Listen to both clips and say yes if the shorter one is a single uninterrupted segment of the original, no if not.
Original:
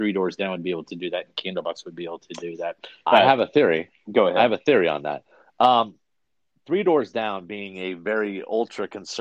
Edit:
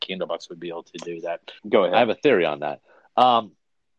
no